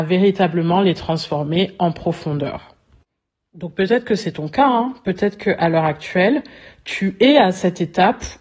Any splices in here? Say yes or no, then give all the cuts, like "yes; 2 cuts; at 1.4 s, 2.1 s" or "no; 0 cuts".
no; 0 cuts